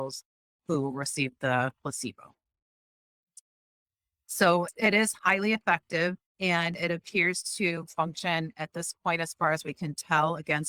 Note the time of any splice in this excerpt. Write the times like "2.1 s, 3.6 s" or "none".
6.3 s